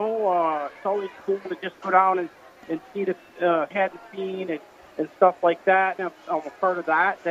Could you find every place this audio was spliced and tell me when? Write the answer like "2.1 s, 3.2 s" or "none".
3.7 s, 6.0 s